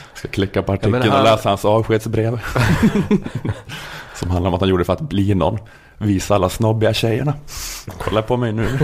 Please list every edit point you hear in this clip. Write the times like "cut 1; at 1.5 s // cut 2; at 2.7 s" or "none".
none